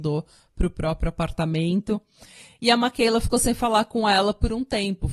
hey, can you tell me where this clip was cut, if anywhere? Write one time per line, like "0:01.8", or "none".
none